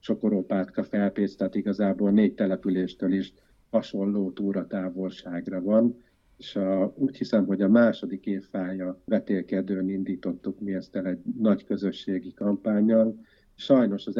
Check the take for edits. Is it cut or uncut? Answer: uncut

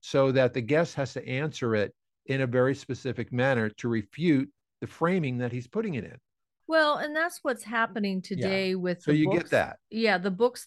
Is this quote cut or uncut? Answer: uncut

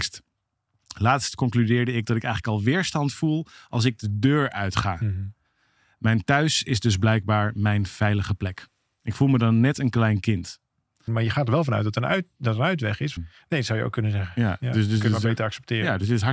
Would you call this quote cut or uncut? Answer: cut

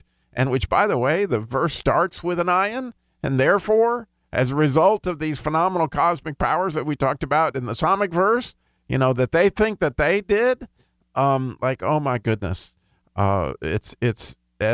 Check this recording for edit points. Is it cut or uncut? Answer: uncut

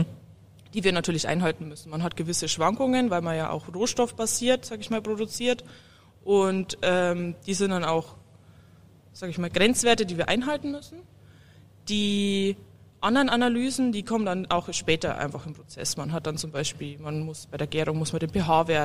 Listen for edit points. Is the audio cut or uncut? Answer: uncut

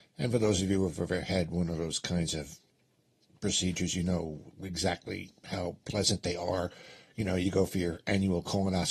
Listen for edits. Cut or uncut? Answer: uncut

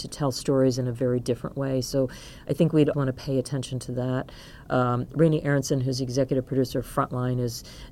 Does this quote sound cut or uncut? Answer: cut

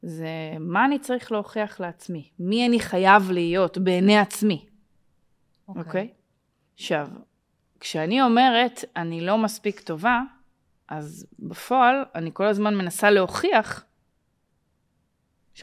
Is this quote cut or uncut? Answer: cut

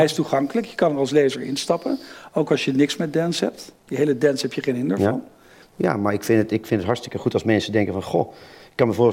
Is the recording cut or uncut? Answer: cut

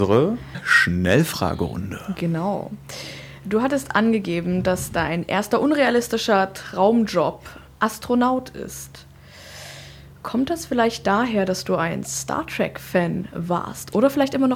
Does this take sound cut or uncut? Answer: uncut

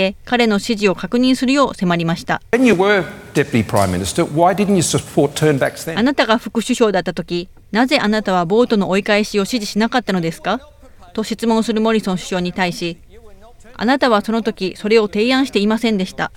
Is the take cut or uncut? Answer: uncut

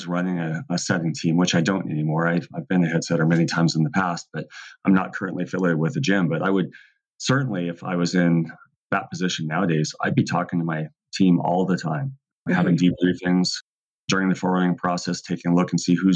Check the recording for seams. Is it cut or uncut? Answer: uncut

